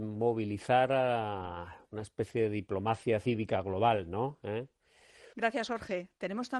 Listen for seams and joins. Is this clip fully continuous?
no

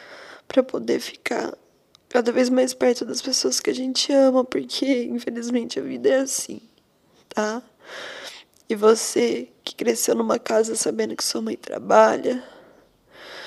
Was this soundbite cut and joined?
no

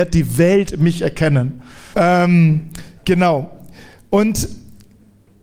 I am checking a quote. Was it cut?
yes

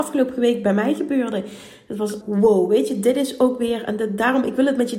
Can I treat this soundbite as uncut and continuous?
no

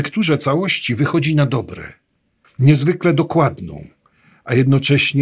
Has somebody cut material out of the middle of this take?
yes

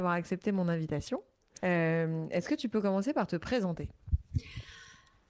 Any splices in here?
yes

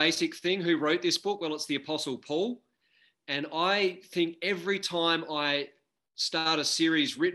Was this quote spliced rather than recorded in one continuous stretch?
no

